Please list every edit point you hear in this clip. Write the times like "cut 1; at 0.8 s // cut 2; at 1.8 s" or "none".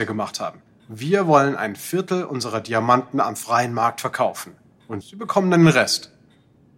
cut 1; at 5.0 s